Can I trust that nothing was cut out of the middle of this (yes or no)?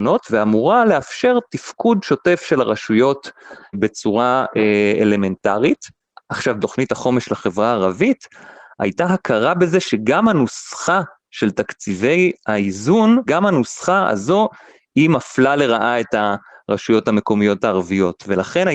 no